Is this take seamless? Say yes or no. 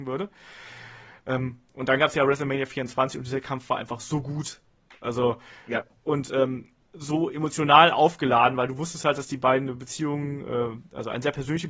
yes